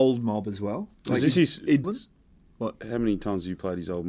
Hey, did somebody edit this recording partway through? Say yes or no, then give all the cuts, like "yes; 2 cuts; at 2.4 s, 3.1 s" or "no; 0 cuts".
yes; 1 cut; at 1.8 s